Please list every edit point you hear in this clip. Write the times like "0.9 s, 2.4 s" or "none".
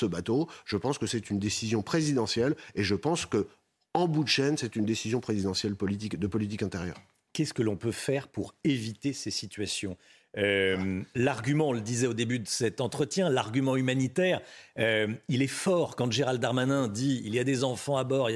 none